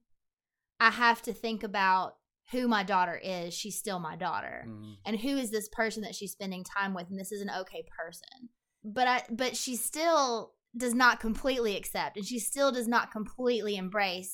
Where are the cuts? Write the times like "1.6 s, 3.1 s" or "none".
none

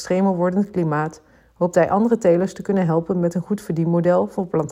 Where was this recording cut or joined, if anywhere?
none

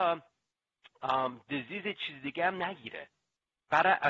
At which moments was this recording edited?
none

